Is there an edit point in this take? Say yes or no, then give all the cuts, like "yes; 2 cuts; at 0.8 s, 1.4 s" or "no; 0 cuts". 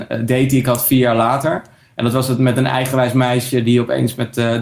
no; 0 cuts